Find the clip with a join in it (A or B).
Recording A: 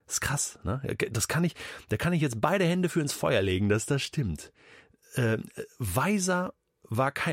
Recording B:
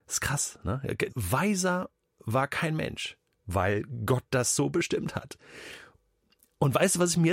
B